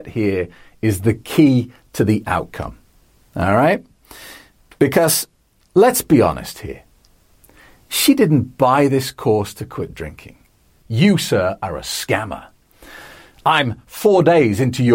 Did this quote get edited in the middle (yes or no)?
yes